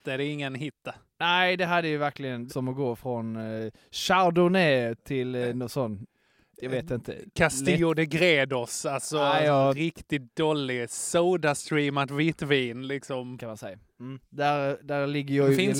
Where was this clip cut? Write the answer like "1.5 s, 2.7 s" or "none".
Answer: 2.5 s, 5.0 s, 13.4 s